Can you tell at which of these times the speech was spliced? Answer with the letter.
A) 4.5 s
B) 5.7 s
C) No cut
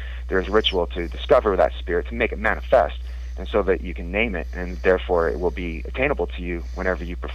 C